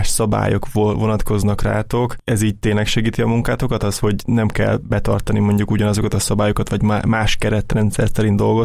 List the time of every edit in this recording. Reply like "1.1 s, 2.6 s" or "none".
none